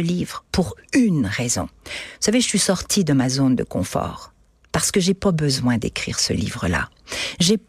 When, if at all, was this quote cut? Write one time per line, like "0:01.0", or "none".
none